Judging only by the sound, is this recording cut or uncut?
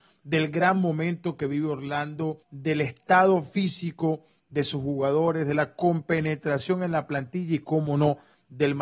cut